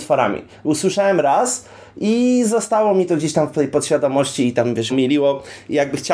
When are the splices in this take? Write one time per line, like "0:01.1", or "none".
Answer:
0:04.9